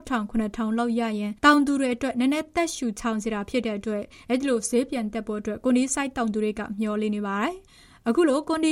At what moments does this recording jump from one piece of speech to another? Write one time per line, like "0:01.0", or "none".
none